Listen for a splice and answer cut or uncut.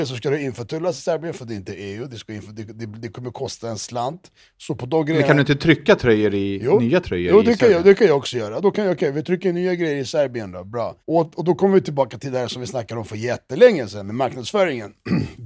cut